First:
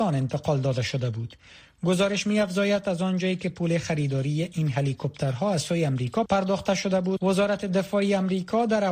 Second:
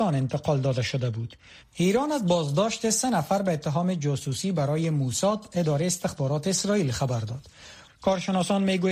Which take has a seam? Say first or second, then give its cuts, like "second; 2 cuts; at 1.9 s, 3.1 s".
second; 2 cuts; at 1.6 s, 7.9 s